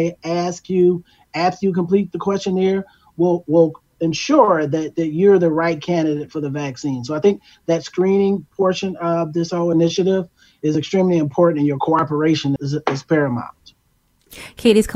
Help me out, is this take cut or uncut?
cut